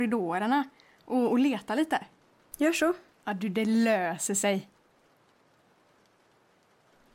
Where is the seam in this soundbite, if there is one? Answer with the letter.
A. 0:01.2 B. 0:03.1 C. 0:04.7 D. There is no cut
B